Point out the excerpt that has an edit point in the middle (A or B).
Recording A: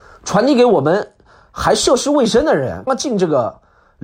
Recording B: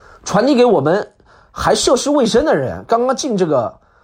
A